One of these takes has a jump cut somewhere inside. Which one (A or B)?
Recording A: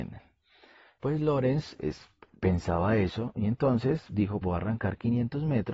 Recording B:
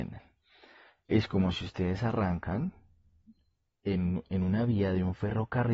A